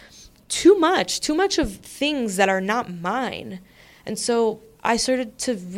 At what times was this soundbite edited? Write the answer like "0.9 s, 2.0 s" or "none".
none